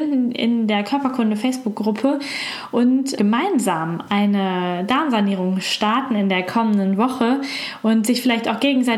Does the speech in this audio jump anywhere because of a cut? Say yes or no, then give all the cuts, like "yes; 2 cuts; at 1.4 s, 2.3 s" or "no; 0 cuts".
yes; 1 cut; at 3.2 s